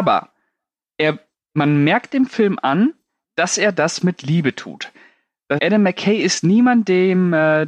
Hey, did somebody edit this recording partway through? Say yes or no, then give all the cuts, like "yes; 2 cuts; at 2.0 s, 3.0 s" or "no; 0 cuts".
yes; 1 cut; at 5.6 s